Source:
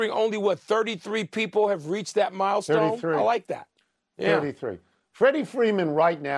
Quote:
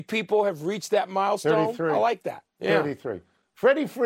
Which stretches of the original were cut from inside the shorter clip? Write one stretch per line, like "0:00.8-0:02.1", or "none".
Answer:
0:03.7-0:04.1